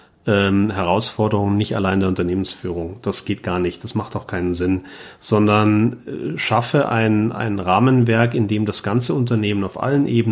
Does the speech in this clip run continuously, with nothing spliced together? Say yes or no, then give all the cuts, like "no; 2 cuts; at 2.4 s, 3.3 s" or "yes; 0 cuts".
yes; 0 cuts